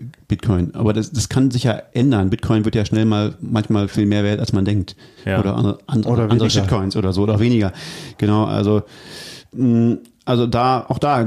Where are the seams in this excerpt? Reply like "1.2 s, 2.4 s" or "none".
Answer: none